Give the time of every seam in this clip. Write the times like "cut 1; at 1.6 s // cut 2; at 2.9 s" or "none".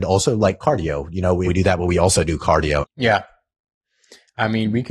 cut 1; at 1.5 s // cut 2; at 2.8 s

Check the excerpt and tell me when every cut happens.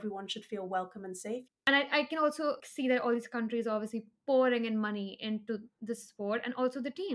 cut 1; at 1.5 s // cut 2; at 2.6 s

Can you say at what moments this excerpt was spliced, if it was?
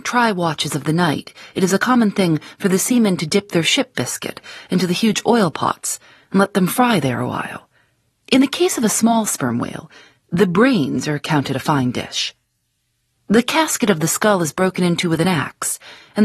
cut 1; at 8.1 s

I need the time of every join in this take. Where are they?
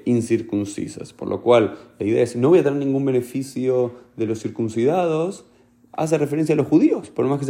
none

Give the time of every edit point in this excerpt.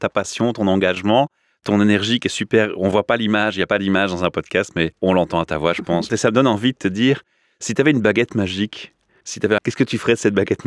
cut 1; at 6.1 s // cut 2; at 9.6 s

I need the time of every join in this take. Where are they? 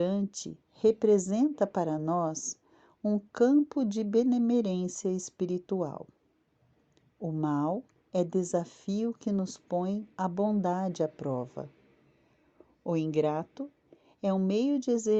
none

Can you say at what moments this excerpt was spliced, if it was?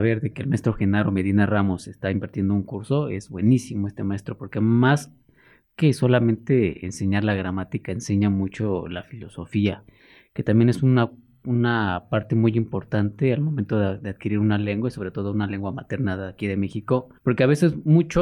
cut 1; at 17.2 s

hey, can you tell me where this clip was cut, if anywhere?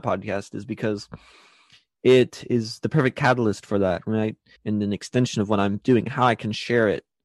cut 1; at 4.6 s

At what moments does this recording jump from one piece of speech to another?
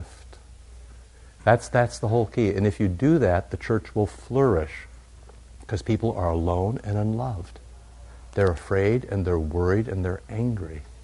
cut 1; at 1.4 s

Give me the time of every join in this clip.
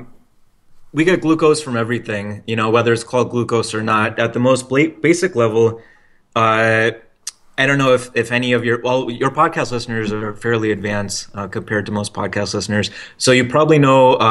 none

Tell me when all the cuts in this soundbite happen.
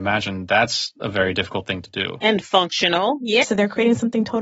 cut 1; at 3.4 s

